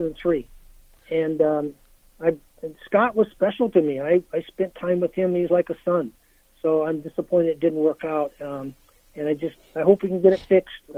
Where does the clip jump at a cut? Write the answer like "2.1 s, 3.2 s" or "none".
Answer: none